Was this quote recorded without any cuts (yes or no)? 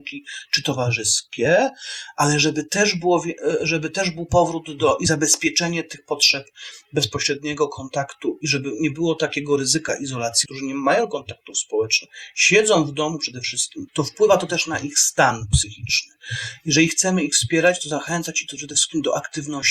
no